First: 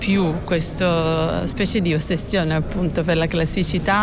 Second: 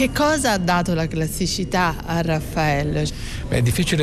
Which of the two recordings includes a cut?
second; 1 cut; at 3.1 s

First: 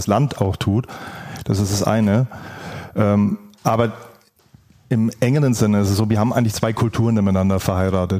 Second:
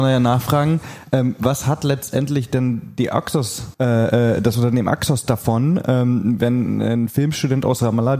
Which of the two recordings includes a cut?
second; 1 cut; at 3.7 s

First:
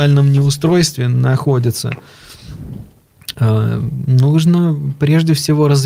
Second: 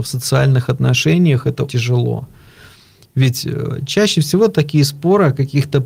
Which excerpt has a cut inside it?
second; 1 cut; at 1.7 s

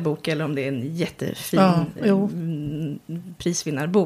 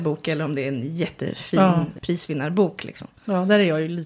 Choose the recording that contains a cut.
second; 1 cut; at 2.0 s

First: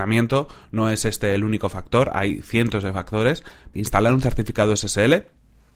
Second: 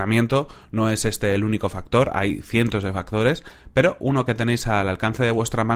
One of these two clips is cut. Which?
first; 1 cut; at 3.7 s

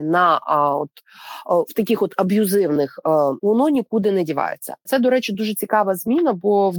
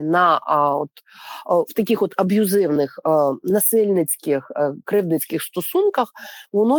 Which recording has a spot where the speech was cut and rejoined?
first; 2 cuts; at 3.4 s, 4.9 s

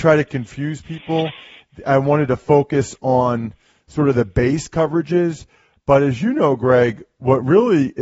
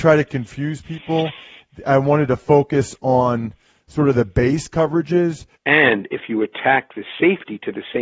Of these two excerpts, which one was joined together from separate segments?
second; 1 cut; at 5.6 s

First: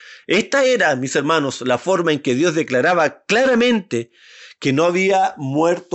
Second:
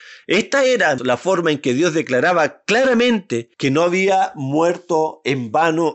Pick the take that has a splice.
second; 2 cuts; at 1.0 s, 3.5 s

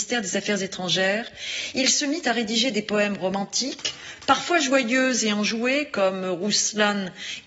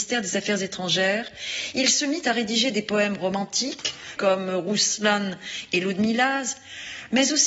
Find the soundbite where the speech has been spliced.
second; 1 cut; at 4.2 s

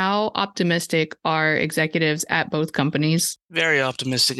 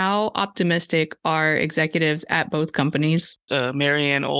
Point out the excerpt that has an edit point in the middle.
second; 1 cut; at 3.5 s

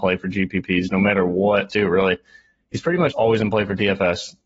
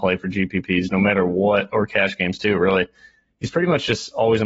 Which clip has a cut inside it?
first; 2 cuts; at 1.7 s, 3.1 s

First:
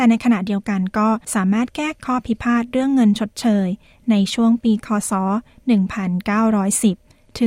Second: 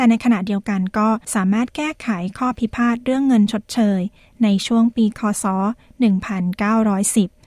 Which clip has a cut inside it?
first; 1 cut; at 2.0 s

